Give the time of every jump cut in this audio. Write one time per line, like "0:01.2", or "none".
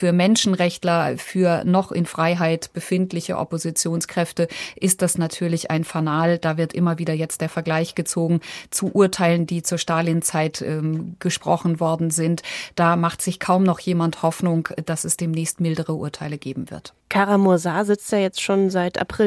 0:17.0